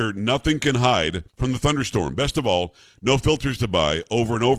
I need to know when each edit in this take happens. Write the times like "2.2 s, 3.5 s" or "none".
1.3 s